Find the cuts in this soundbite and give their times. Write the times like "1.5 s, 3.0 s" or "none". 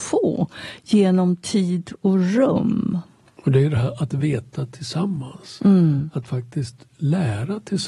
3.3 s